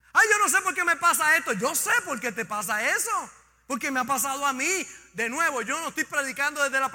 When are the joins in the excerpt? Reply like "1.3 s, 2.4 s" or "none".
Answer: none